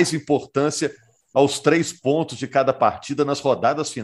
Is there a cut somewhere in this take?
no; 0 cuts

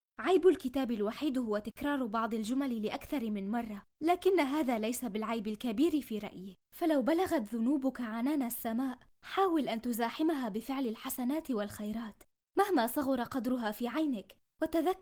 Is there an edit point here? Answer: yes; 1 cut; at 6.6 s

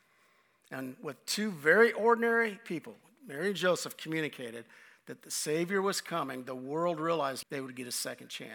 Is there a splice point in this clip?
yes; 1 cut; at 7.4 s

